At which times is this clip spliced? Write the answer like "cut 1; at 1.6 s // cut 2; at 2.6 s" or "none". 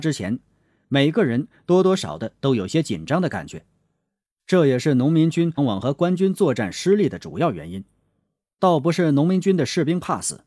cut 1; at 2.0 s // cut 2; at 5.6 s